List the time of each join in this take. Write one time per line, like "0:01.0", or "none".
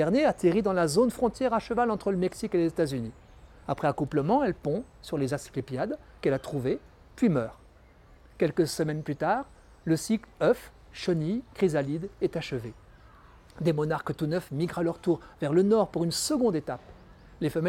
none